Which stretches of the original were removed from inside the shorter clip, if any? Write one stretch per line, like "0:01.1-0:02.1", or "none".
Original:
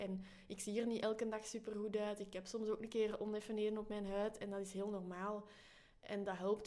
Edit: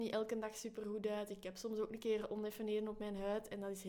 none